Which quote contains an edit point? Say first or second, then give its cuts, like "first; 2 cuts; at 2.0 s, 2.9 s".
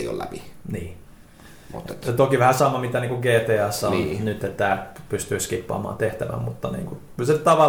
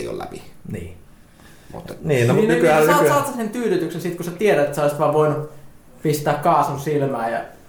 second; 1 cut; at 2.0 s